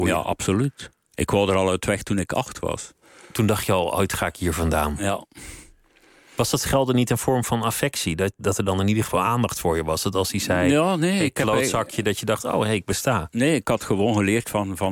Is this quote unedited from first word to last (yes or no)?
yes